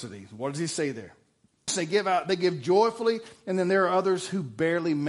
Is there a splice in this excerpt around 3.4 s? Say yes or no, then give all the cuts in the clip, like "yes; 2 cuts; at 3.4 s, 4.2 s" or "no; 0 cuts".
no; 1 cut; at 1.7 s